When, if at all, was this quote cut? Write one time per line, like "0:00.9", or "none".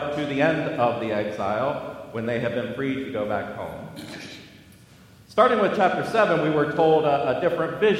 none

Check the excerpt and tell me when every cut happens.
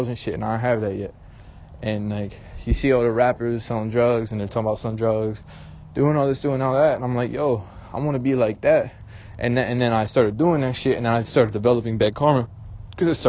none

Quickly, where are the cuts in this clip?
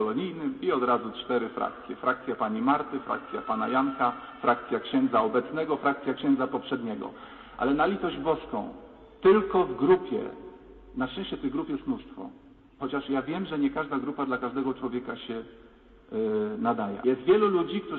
0:12.8
0:17.0

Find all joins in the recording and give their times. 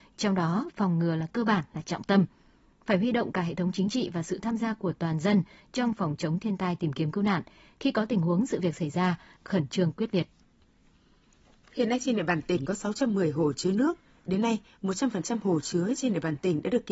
0:09.4

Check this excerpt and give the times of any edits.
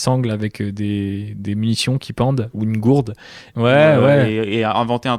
0:03.5

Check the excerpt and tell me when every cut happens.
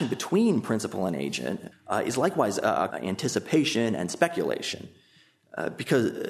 0:01.7
0:02.9

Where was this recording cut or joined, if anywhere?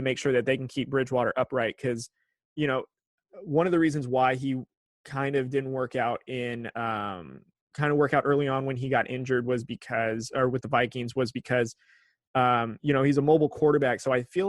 0:07.7

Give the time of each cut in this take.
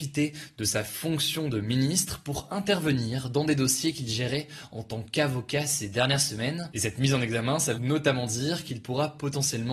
0:07.7

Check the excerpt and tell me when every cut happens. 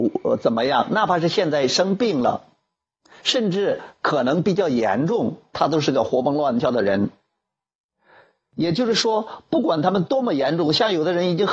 0:05.5

